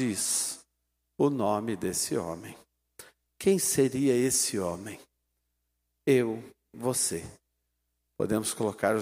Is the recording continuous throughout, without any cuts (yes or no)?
yes